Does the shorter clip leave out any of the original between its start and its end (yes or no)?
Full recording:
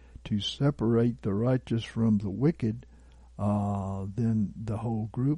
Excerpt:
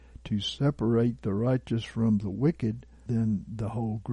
yes